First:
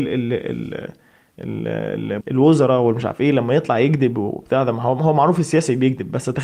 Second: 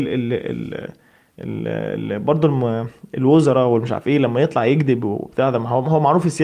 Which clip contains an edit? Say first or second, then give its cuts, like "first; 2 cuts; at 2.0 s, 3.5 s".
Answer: first; 1 cut; at 2.2 s